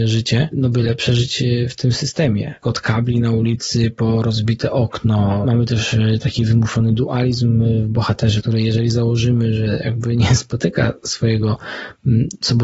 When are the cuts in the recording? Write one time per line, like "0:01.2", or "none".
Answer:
0:02.6